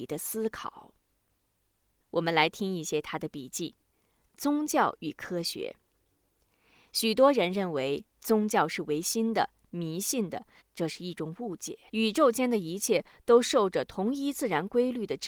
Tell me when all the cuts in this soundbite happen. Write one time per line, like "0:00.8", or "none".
0:10.6
0:11.9